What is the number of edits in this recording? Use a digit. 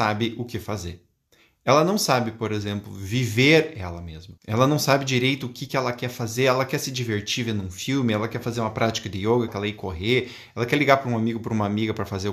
2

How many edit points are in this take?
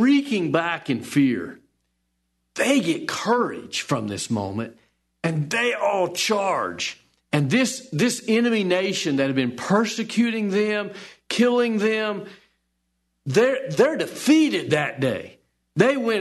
0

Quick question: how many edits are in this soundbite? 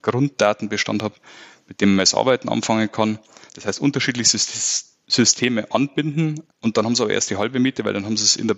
1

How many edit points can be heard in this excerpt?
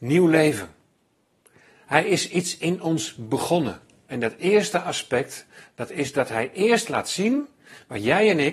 1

